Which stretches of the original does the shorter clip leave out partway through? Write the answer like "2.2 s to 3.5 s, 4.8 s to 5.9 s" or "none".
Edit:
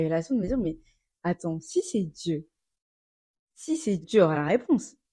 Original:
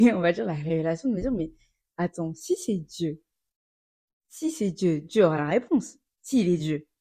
4.7 s to 5.0 s